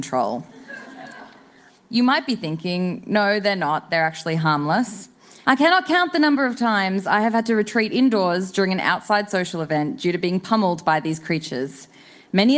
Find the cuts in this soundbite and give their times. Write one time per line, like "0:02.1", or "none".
0:01.8
0:05.4